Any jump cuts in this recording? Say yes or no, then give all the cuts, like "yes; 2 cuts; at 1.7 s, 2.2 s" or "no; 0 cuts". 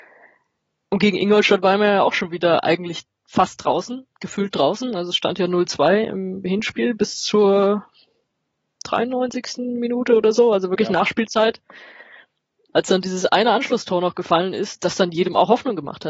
no; 0 cuts